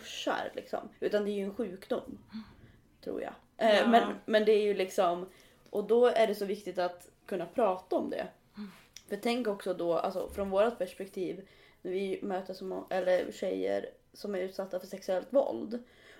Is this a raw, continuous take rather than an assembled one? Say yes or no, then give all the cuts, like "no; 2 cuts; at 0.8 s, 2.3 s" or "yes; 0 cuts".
yes; 0 cuts